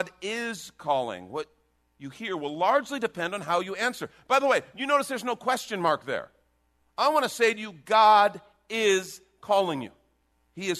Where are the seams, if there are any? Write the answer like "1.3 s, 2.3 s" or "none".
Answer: none